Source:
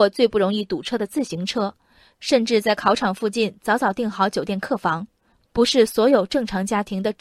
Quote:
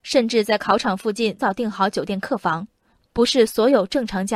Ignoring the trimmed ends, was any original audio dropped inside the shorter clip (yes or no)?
yes